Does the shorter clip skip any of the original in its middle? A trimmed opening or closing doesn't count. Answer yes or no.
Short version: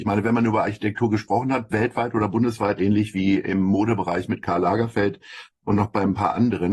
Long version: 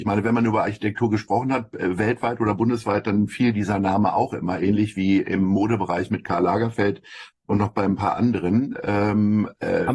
yes